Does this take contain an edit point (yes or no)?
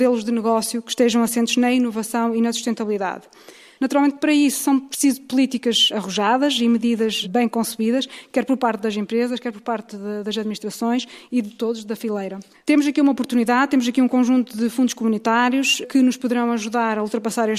yes